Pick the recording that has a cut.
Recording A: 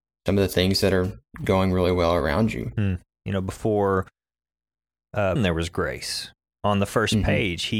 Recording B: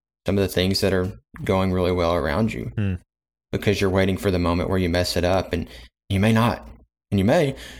A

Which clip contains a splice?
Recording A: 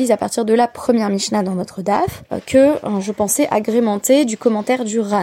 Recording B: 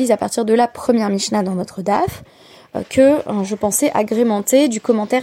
A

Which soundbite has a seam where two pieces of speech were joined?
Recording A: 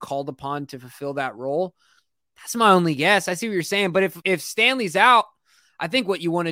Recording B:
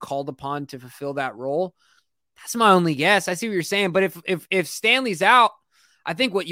A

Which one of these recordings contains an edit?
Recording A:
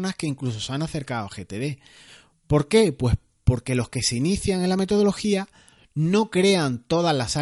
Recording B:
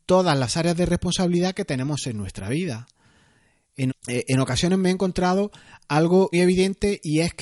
B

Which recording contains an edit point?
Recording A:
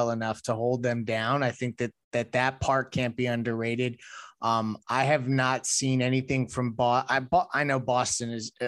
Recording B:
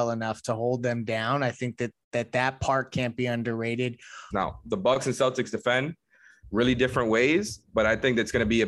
B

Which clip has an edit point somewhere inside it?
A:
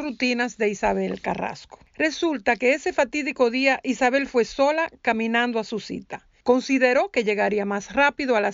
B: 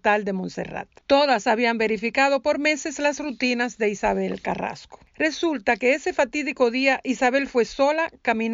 B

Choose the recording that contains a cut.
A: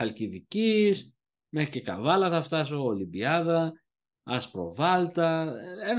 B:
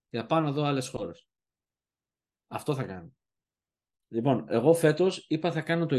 B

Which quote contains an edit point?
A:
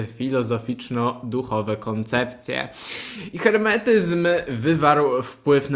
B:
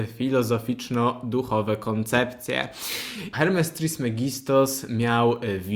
B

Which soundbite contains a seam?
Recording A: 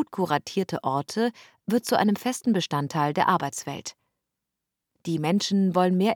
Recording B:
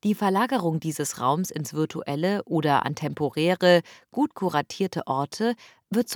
A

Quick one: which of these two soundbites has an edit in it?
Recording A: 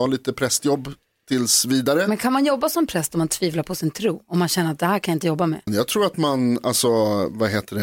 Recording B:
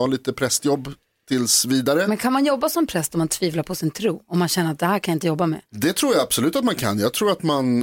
A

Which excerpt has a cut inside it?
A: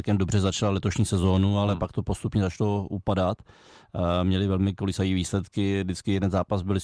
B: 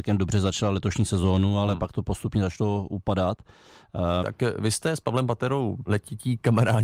B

